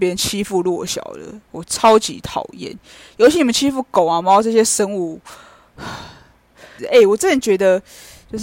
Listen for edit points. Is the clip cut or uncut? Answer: cut